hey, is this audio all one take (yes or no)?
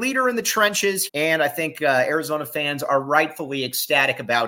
no